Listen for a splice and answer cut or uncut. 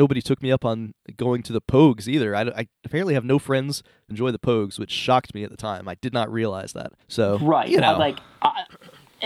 cut